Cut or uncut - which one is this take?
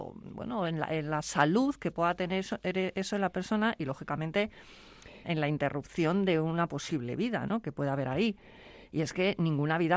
cut